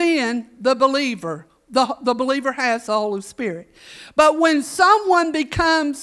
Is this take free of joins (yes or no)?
yes